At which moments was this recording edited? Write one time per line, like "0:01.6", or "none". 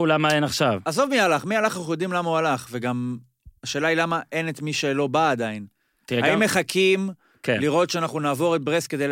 none